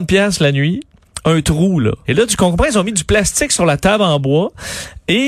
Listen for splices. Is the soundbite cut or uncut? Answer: cut